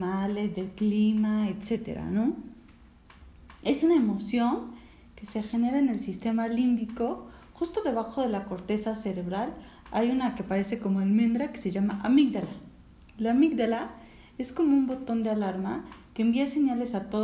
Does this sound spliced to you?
no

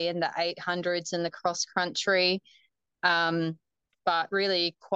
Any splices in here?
no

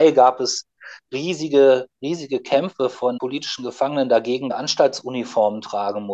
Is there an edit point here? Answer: yes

